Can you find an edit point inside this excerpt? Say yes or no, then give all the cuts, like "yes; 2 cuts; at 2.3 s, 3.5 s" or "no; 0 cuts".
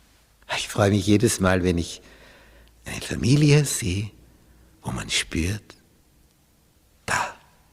yes; 1 cut; at 3.7 s